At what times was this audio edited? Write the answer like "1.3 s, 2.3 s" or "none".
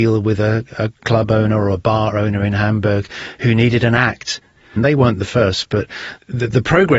4.8 s